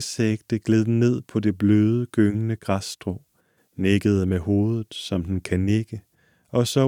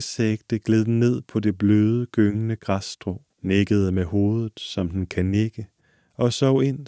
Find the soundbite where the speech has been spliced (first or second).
second